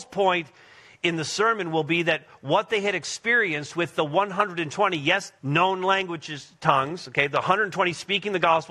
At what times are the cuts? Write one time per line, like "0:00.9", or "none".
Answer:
0:05.4